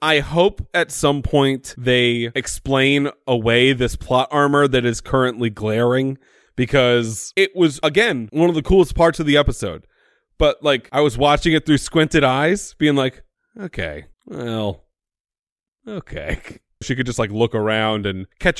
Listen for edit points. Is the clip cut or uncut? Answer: cut